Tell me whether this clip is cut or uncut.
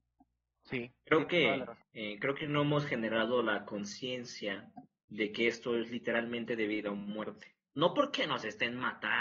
cut